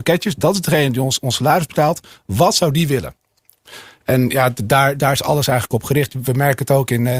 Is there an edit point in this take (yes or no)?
no